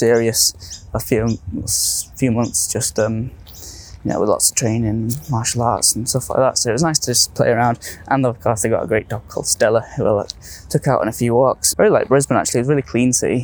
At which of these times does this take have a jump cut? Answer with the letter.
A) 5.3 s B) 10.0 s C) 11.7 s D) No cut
C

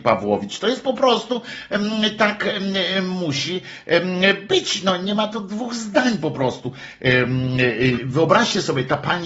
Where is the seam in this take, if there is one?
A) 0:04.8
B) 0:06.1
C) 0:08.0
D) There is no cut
C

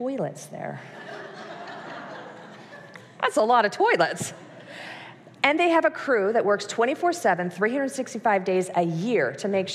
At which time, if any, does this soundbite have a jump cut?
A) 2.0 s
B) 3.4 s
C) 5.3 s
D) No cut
D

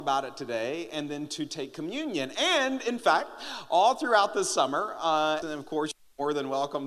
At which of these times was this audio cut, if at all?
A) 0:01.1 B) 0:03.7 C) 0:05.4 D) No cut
C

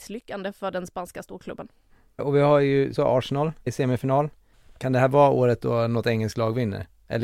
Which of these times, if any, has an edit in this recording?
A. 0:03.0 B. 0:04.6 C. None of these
A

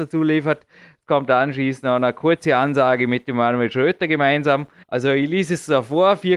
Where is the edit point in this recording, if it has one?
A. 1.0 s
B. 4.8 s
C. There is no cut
B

